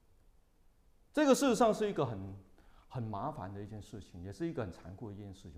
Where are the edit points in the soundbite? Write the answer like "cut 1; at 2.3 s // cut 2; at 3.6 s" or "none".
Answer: cut 1; at 1.1 s